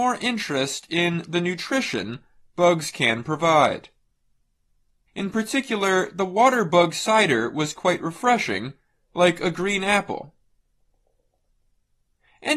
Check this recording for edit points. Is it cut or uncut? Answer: cut